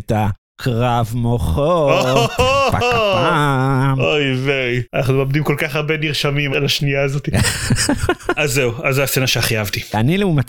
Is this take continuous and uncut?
yes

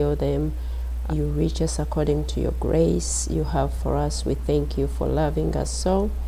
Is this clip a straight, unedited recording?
no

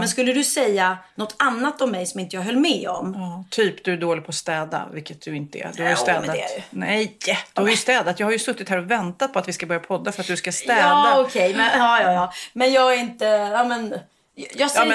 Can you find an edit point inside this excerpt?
no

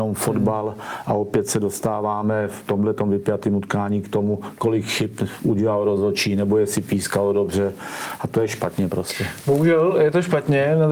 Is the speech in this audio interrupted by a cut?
no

